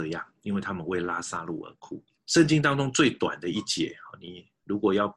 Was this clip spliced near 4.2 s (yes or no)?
no